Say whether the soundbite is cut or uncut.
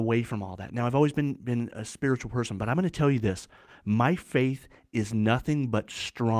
uncut